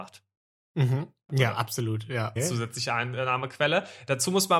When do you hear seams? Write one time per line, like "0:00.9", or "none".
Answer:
0:01.3
0:02.4